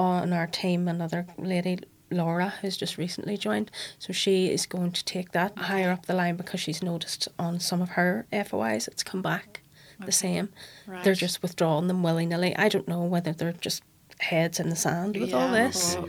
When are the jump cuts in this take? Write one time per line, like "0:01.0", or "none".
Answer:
0:15.1